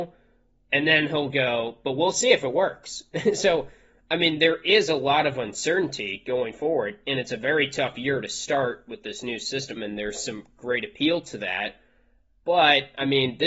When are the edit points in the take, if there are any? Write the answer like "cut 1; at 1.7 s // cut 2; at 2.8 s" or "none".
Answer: cut 1; at 9.8 s